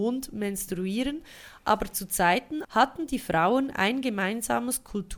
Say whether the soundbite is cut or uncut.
cut